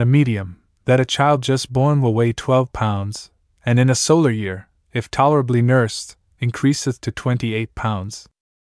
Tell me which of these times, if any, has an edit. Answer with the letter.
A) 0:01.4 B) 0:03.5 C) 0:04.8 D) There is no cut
D